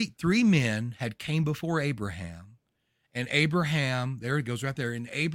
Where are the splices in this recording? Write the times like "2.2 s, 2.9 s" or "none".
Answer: none